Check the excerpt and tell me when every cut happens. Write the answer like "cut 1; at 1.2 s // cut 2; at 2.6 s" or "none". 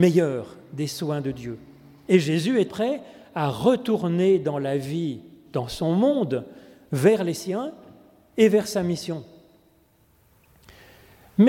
cut 1; at 2.7 s